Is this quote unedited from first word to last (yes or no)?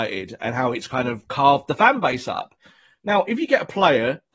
yes